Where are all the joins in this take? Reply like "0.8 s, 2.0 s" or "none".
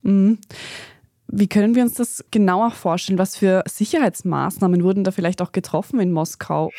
none